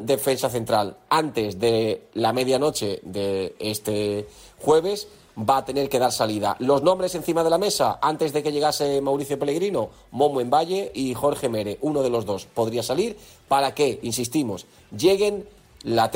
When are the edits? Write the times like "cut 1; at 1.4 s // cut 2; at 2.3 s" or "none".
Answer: none